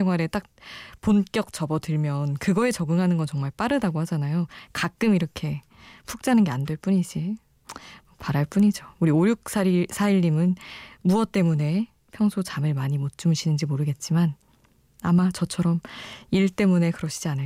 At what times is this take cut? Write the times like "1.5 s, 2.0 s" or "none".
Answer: 8.2 s